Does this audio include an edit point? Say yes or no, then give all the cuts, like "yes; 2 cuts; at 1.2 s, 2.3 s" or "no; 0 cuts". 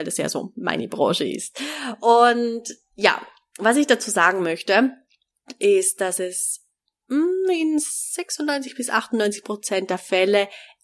no; 0 cuts